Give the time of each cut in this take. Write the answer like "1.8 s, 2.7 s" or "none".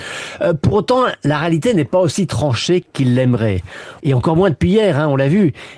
4.0 s